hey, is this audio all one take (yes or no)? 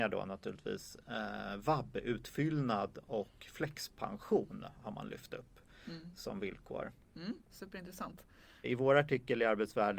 no